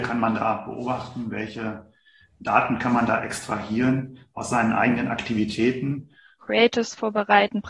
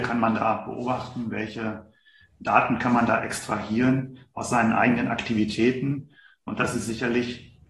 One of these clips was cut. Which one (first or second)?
first